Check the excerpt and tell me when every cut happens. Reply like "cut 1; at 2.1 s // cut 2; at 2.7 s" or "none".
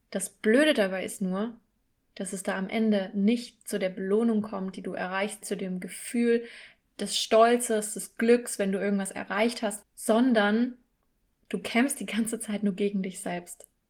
cut 1; at 5.4 s // cut 2; at 9.8 s